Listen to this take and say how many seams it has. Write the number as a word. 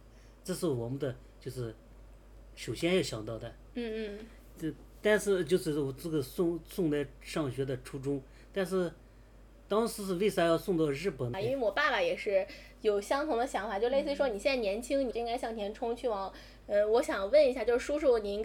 three